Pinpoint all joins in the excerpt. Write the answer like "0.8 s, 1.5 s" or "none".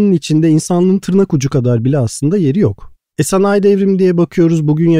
3.1 s